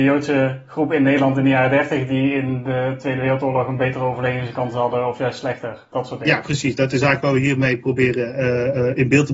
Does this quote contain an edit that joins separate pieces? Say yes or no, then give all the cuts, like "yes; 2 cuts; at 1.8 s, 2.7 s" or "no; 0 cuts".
no; 0 cuts